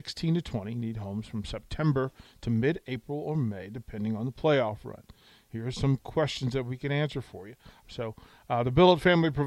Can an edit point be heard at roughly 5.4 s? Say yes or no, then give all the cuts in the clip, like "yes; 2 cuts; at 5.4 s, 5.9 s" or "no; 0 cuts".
no; 1 cut; at 7.8 s